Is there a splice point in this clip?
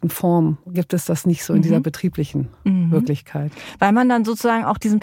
no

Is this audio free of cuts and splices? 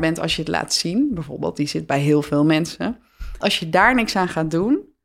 no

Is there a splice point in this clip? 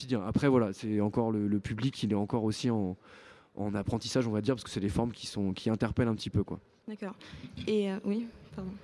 no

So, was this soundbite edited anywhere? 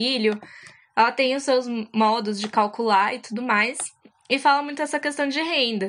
no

